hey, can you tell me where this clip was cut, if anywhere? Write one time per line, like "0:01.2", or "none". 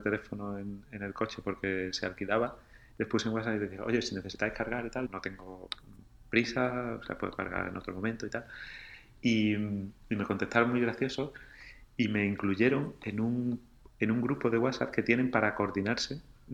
0:05.1

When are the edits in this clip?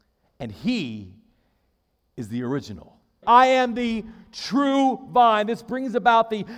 0:03.2

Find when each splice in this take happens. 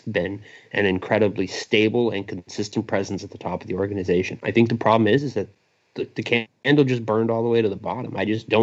none

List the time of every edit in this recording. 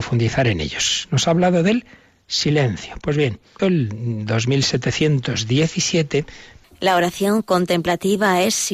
0:03.6
0:06.6

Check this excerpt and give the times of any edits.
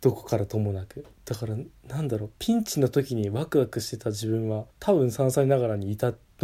0:01.2
0:04.7

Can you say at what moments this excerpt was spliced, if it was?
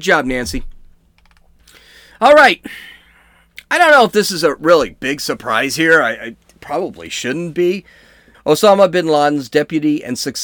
0:08.3

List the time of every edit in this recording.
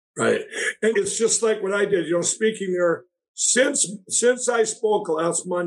0:00.9

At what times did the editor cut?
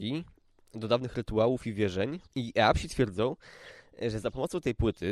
0:02.3

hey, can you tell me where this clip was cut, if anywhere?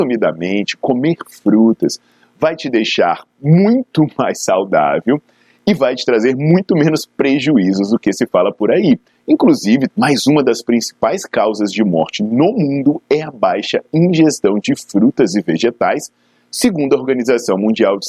0:09.9

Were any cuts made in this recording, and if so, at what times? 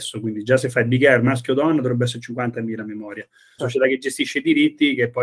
0:03.6

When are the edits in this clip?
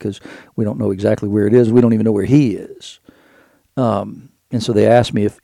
none

